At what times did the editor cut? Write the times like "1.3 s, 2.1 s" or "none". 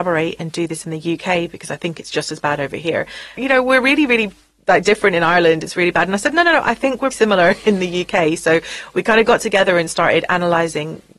3.4 s, 7.1 s